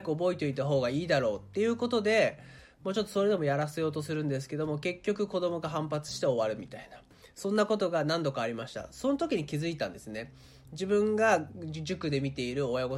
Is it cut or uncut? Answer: uncut